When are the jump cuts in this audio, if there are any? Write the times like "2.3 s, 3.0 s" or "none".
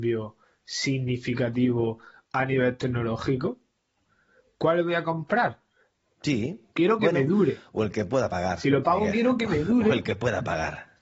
6.0 s

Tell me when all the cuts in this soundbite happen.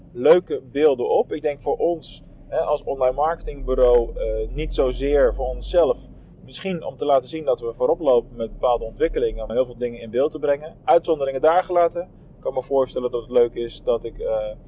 9.5 s

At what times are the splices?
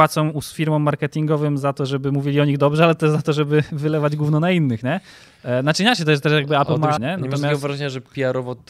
7.0 s

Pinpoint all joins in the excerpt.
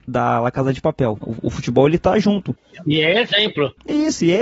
1.2 s

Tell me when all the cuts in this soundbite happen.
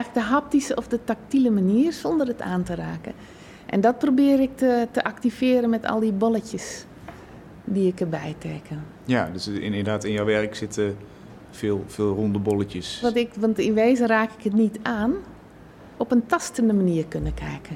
13.0 s, 15.9 s

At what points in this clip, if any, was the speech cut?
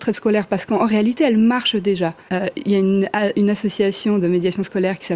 2.3 s

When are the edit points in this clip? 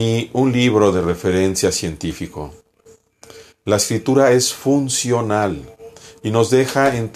none

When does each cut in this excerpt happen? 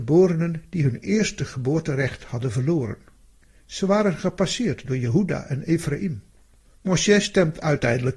6.6 s

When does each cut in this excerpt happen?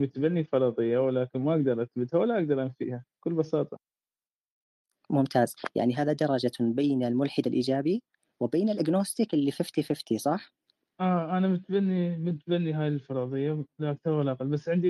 none

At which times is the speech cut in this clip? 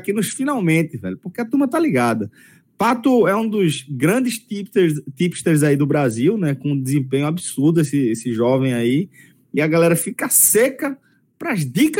none

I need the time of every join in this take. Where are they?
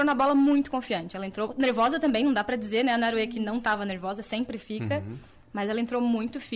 none

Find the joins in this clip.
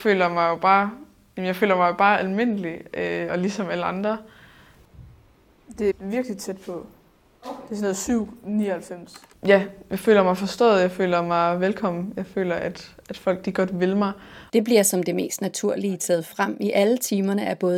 5.9 s, 9.3 s, 14.5 s

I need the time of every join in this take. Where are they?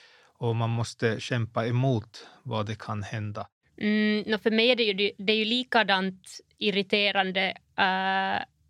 3.6 s

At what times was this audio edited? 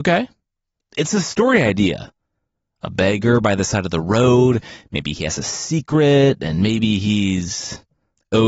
none

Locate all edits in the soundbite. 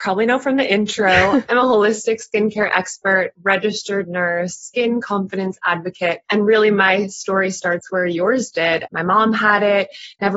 8.9 s

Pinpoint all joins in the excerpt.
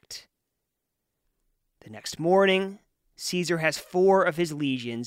none

